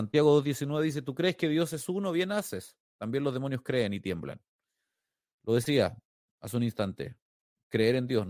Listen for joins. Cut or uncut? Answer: uncut